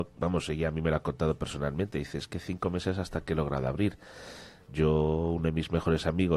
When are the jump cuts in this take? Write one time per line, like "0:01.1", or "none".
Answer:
0:04.7

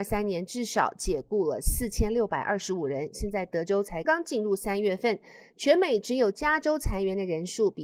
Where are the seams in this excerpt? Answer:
0:04.0

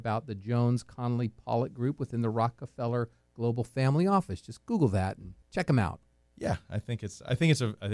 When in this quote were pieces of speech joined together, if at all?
0:05.4

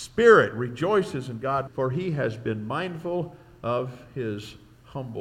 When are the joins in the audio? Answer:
0:01.7

